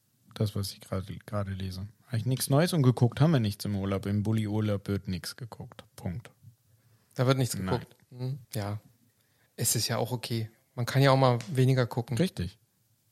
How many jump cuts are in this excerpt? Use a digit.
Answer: 1